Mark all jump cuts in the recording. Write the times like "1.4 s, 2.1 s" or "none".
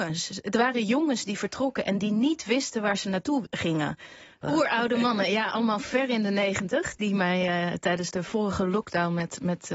4.4 s

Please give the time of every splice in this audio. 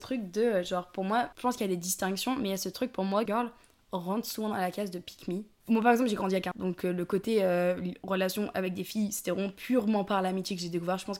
3.3 s, 6.5 s

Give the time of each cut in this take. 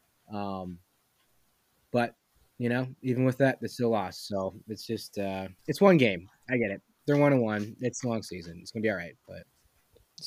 5.6 s

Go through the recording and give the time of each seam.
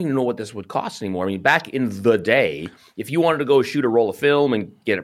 none

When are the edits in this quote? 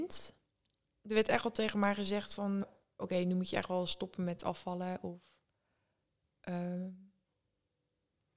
2.6 s

